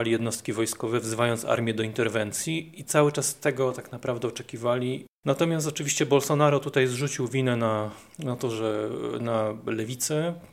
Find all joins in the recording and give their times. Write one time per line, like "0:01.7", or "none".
0:05.1

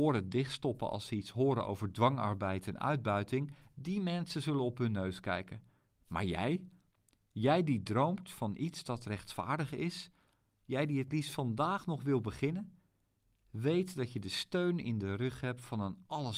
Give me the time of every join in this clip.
0:05.9

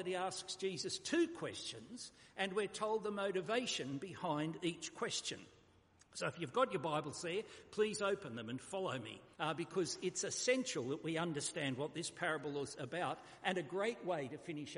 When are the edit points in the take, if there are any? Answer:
0:09.3

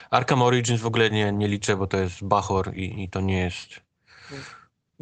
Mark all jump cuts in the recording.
none

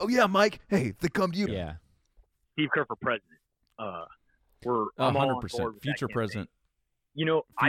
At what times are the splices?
0:01.5

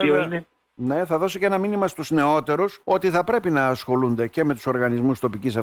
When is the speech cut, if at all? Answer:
0:02.8

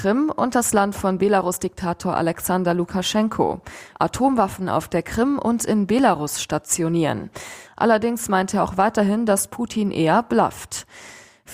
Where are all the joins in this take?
0:03.9
0:07.6

